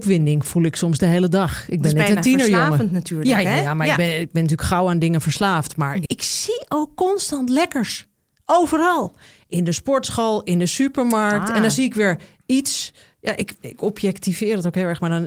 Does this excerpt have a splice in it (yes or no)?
yes